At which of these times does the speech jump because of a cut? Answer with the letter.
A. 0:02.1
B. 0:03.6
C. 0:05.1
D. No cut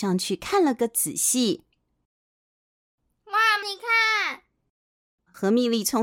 B